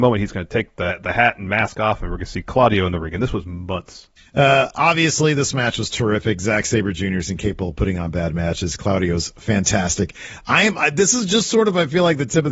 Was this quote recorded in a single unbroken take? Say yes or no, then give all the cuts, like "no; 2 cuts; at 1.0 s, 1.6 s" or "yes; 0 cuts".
no; 1 cut; at 4.2 s